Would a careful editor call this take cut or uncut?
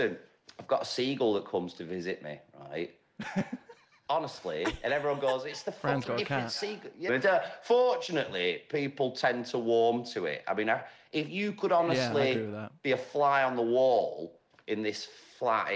cut